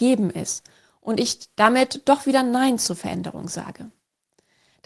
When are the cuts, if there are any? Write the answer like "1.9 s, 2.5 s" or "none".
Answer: none